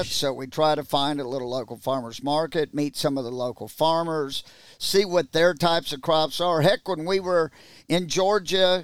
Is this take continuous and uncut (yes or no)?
yes